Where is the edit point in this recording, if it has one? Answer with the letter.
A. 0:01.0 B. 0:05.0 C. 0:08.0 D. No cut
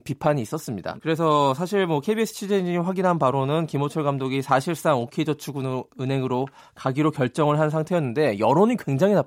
A